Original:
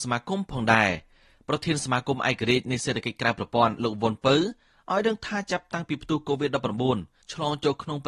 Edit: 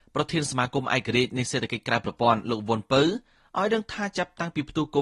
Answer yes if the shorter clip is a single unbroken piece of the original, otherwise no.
yes